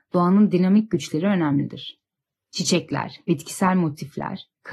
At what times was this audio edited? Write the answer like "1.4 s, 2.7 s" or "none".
none